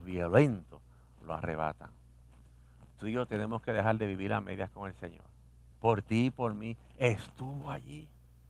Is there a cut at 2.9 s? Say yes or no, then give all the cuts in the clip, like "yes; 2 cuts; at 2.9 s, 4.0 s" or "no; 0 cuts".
no; 1 cut; at 5.7 s